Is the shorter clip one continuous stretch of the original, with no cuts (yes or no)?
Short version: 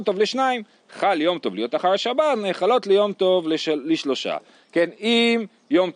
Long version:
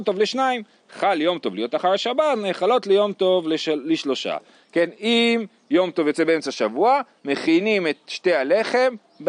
yes